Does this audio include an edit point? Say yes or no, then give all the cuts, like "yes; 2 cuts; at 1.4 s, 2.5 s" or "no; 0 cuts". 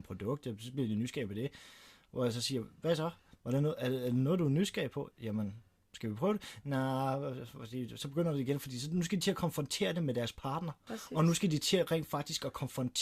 yes; 2 cuts; at 5.1 s, 10.9 s